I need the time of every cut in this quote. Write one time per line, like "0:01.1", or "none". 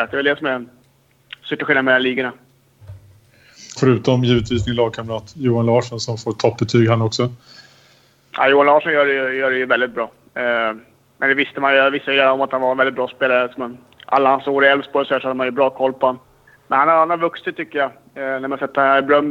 0:03.8

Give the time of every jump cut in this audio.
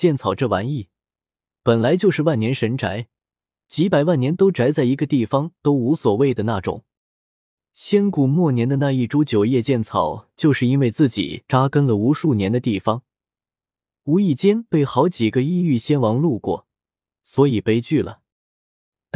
none

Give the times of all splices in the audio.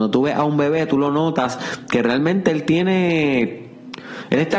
none

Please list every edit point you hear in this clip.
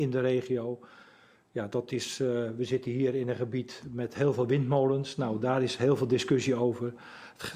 none

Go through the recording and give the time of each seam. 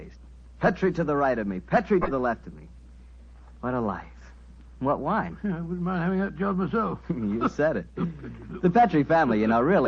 none

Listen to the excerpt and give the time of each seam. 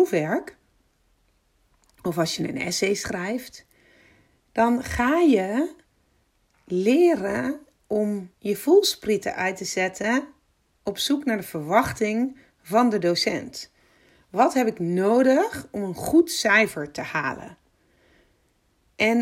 none

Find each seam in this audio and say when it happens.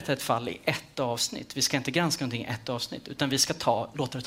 none

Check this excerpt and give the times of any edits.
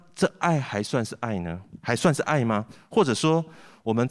none

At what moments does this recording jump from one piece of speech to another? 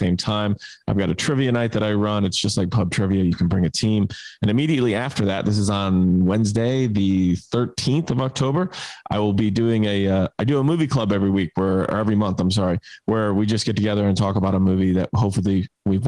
none

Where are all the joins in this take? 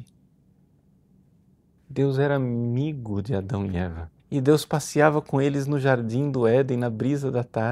0:01.8
0:04.2

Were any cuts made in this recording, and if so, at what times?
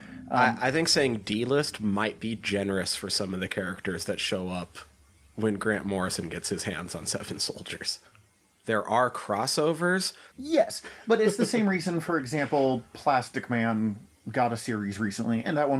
0:08.6
0:10.3

